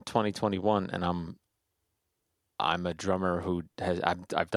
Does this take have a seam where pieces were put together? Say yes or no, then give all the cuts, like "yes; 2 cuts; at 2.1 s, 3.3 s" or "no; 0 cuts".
no; 0 cuts